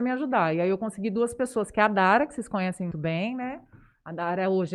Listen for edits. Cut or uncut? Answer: cut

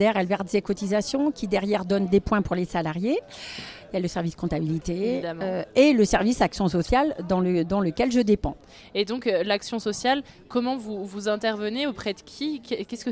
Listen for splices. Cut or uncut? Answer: uncut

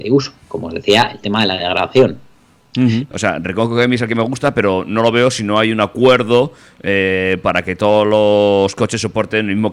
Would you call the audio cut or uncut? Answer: cut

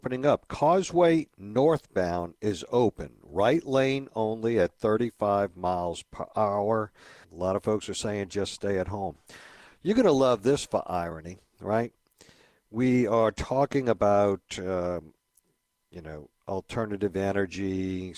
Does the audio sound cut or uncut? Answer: cut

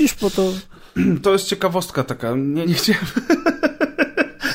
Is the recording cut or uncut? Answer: cut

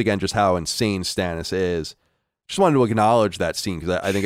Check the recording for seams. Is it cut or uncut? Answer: uncut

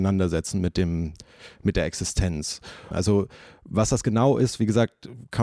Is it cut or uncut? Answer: cut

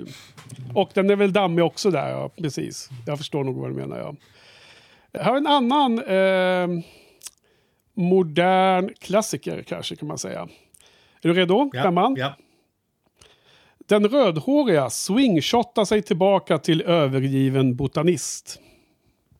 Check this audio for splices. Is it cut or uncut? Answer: cut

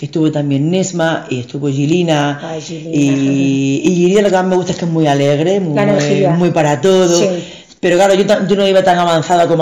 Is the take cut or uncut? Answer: uncut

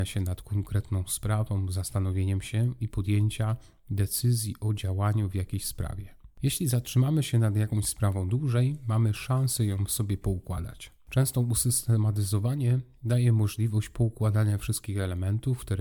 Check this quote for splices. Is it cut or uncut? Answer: uncut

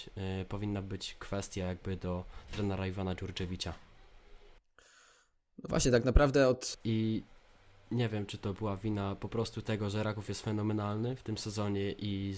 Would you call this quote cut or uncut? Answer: cut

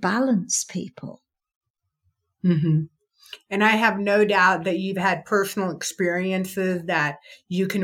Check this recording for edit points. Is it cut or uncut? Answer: uncut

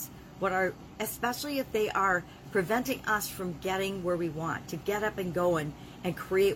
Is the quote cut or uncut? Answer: cut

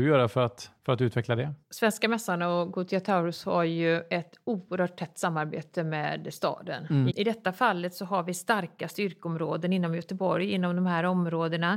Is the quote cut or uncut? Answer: cut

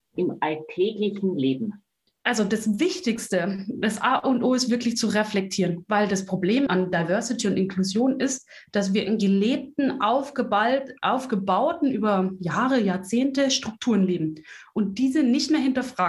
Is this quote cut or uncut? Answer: cut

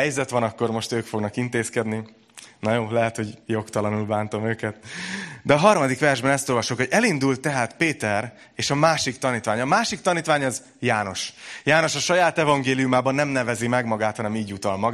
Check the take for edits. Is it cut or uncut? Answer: uncut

